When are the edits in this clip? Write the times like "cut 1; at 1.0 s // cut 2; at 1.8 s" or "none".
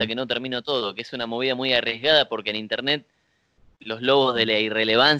none